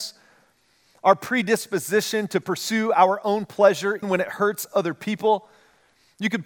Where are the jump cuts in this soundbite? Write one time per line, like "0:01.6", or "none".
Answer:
0:04.0